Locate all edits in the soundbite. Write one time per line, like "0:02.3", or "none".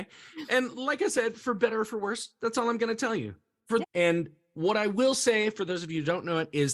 0:03.8